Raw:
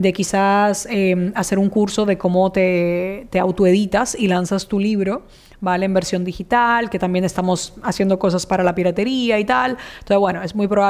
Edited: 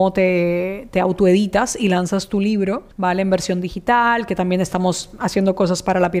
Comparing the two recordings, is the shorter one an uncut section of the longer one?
no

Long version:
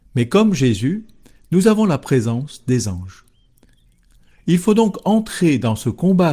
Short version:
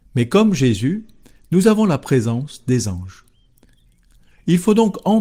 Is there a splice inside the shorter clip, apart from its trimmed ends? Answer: no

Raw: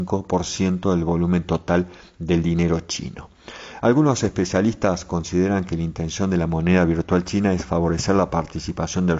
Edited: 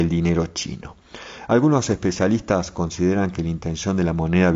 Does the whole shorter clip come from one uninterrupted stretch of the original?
yes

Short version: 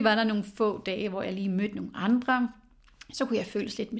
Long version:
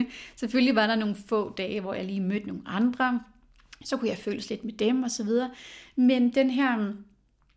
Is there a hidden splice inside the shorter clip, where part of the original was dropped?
no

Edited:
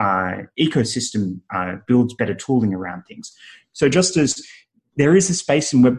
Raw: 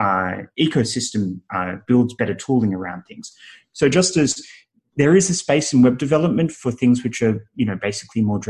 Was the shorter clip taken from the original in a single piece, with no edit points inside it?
yes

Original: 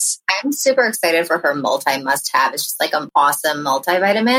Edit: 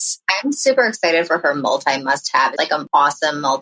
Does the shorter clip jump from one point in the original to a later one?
yes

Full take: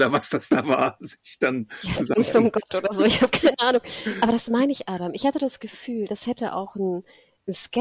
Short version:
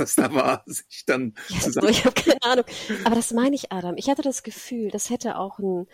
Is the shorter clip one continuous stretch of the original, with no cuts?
no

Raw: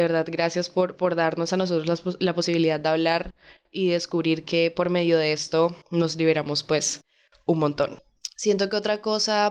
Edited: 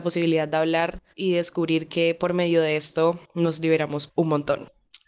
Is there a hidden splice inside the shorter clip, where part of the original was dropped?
yes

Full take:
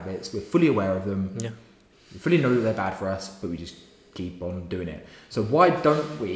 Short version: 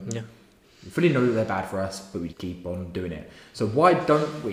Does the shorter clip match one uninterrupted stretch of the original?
no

